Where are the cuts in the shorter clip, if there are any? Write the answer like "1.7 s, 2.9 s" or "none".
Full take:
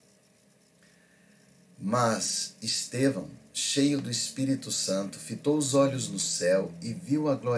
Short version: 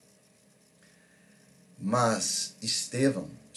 none